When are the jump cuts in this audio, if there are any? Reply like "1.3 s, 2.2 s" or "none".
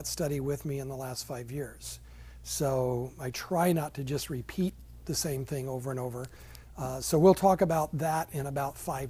none